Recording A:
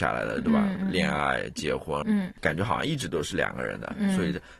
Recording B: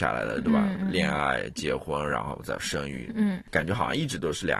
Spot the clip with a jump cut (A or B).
A